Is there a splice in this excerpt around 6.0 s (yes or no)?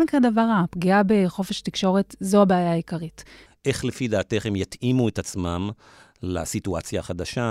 no